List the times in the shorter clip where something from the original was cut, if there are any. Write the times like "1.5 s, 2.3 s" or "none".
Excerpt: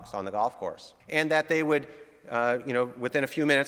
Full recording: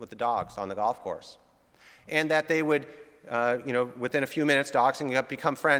1.0 s